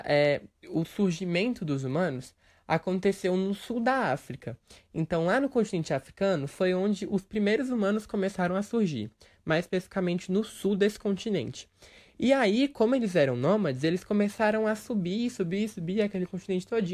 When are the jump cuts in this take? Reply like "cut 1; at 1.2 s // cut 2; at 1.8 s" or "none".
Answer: none

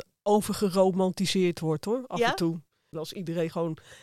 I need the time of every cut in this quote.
cut 1; at 2.9 s

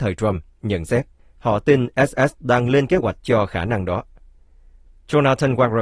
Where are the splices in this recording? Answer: cut 1; at 1.2 s

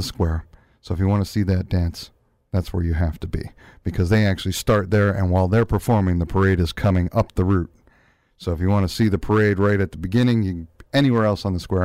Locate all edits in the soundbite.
none

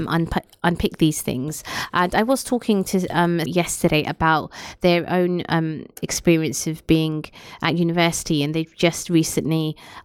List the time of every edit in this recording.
cut 1; at 3.5 s

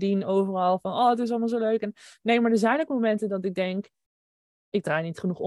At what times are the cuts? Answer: none

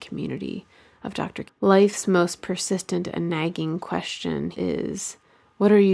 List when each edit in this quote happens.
cut 1; at 1.5 s // cut 2; at 4.5 s

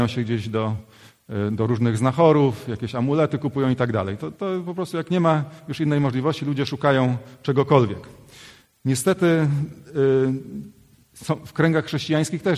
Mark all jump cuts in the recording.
none

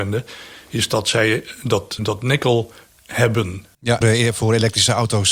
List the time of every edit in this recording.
cut 1; at 2.0 s // cut 2; at 4.0 s

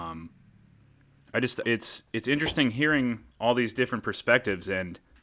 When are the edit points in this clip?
cut 1; at 1.6 s

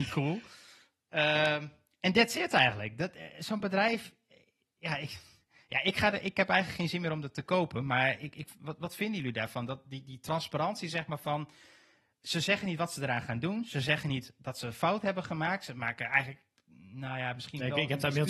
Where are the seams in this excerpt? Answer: none

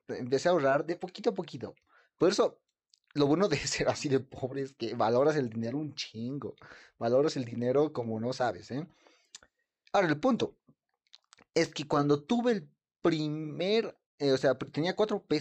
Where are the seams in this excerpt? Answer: none

